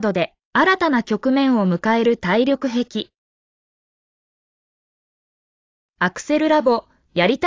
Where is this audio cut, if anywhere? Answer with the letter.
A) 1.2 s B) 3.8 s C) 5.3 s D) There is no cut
D